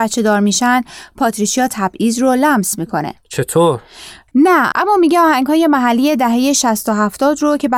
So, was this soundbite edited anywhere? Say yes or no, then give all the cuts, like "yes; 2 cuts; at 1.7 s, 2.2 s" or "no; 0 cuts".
yes; 1 cut; at 4.3 s